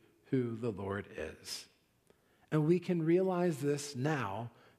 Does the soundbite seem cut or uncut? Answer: uncut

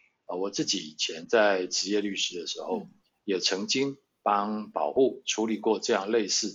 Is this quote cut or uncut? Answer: uncut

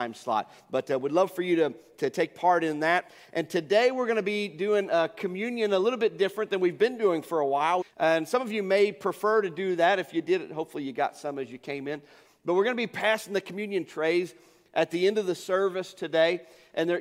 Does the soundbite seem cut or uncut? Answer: cut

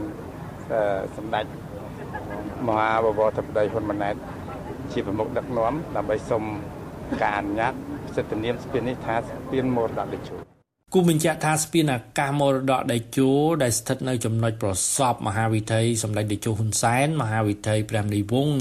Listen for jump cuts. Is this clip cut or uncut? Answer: uncut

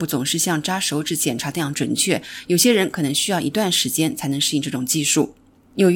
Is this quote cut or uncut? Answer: uncut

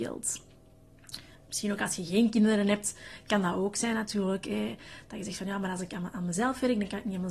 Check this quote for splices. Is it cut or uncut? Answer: uncut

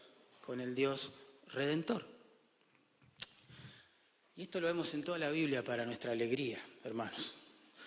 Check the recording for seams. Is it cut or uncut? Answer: uncut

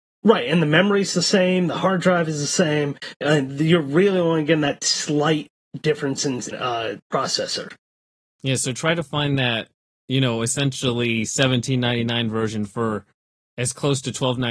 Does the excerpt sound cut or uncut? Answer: cut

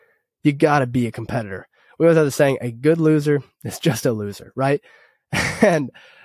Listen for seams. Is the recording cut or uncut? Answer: uncut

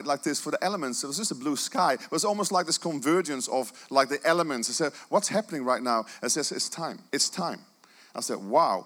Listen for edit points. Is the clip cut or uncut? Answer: cut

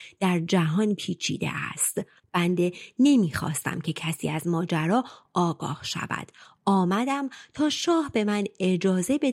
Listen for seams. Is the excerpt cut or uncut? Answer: cut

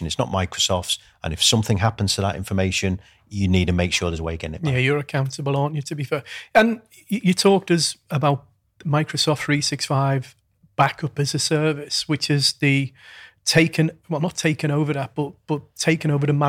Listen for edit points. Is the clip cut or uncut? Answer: uncut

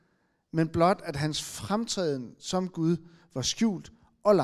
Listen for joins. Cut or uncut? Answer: uncut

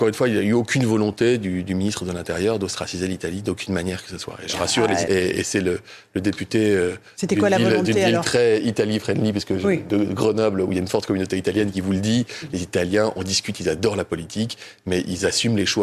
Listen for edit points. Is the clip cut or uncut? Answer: cut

